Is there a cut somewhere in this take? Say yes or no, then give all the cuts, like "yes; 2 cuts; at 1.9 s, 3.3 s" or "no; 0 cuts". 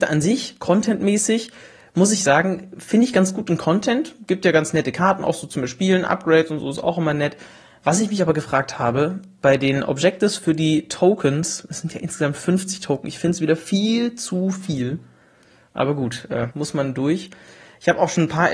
yes; 1 cut; at 16.5 s